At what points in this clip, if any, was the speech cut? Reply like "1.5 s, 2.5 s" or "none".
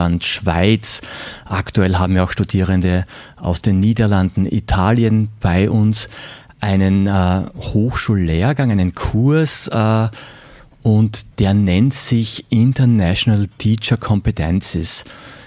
11.3 s